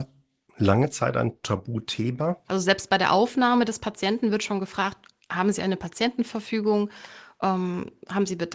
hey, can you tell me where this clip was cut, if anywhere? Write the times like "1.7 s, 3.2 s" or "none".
2.5 s